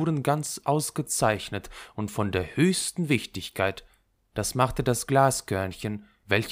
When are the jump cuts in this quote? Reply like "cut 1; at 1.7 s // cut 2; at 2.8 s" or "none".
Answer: none